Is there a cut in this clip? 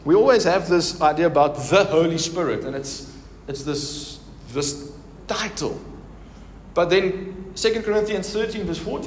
no; 0 cuts

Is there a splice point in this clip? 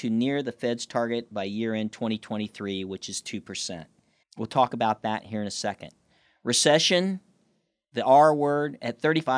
yes; 1 cut; at 4.2 s

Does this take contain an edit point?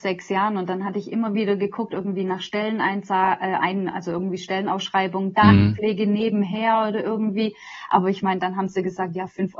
no; 0 cuts

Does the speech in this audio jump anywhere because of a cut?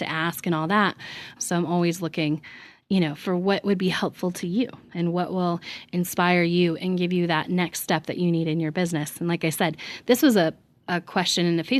yes; 1 cut; at 1.4 s

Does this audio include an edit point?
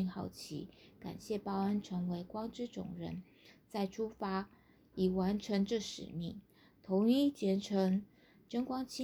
no; 0 cuts

